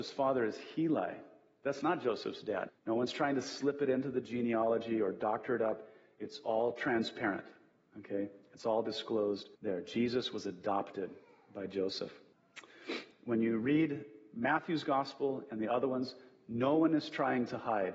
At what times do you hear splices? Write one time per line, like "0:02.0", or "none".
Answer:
0:02.7
0:09.6
0:13.1